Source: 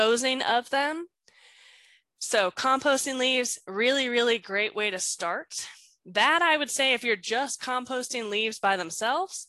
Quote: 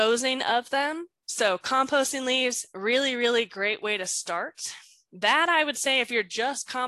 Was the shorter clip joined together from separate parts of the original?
yes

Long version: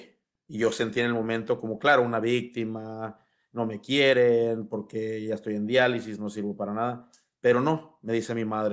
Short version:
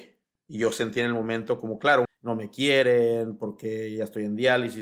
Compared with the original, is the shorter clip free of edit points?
no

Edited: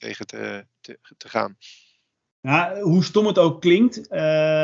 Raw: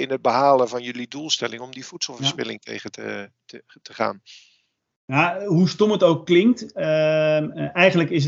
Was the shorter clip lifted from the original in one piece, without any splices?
yes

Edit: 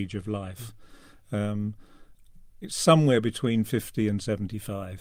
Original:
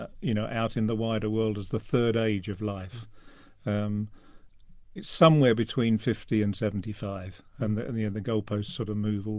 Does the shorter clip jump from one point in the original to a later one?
no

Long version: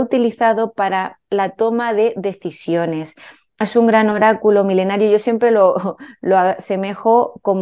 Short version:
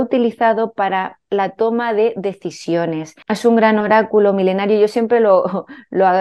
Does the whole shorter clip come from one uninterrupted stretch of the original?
no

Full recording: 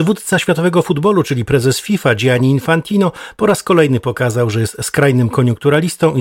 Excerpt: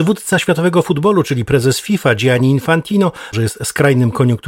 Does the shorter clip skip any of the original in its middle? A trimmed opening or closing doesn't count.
yes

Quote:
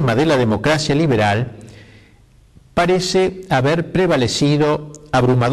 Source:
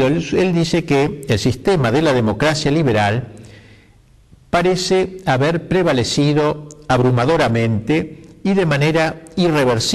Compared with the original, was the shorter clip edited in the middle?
no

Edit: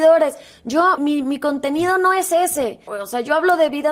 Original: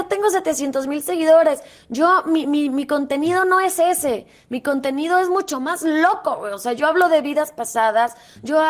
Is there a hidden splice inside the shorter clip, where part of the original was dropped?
yes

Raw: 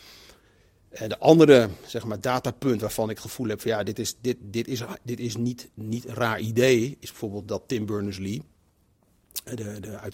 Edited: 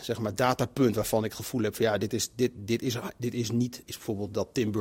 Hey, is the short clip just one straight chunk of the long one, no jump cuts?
no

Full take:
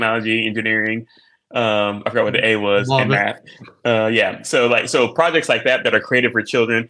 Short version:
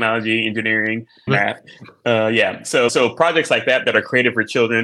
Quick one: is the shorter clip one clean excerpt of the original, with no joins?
no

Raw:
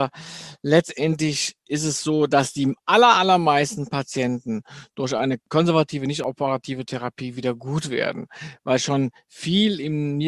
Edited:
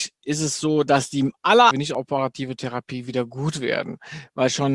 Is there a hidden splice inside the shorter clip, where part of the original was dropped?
yes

